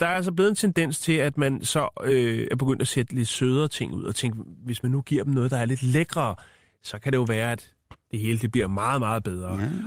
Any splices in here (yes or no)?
no